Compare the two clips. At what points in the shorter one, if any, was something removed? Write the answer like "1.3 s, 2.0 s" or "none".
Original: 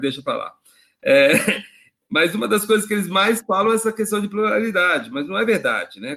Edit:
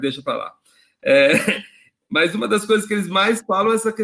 none